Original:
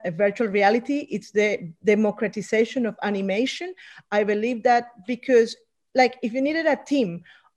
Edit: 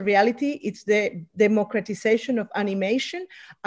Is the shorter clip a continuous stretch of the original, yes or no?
yes